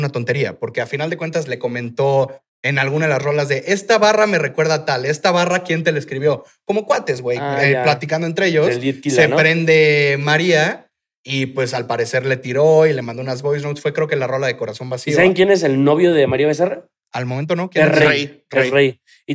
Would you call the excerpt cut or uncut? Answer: uncut